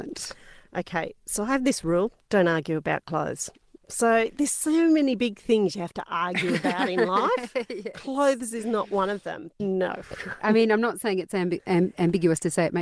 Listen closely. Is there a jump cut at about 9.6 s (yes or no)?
yes